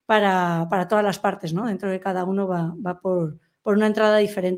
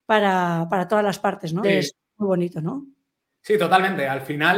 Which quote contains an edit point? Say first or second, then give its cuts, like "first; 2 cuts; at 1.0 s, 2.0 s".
second; 1 cut; at 1.6 s